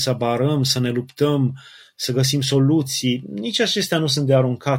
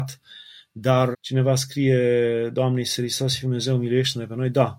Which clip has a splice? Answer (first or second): second